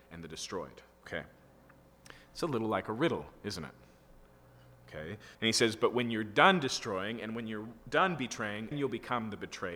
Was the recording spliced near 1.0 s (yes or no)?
yes